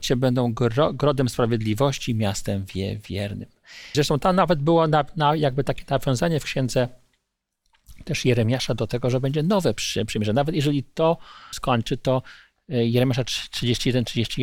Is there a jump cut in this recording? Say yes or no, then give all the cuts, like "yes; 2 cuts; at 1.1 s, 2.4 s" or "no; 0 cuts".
yes; 2 cuts; at 3.9 s, 11.5 s